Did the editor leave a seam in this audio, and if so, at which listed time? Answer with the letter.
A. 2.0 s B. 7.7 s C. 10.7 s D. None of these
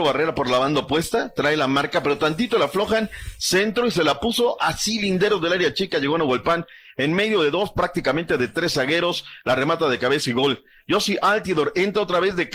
D